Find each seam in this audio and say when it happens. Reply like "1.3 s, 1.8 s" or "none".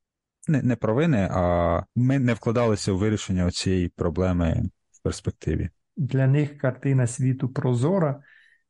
5.8 s